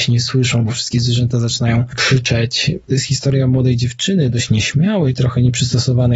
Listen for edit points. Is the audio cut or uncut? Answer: cut